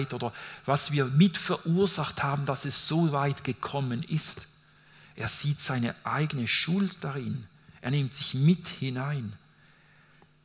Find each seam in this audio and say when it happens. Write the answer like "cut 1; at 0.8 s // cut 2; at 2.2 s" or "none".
none